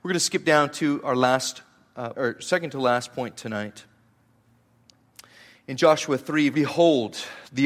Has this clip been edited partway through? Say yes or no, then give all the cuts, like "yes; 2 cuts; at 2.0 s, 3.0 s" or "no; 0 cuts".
yes; 2 cuts; at 2.1 s, 6.5 s